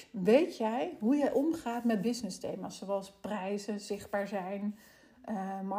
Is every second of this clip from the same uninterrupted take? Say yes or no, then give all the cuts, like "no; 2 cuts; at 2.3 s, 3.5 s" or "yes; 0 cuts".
yes; 0 cuts